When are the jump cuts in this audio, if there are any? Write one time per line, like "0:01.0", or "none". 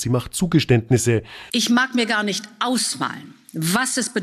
0:01.5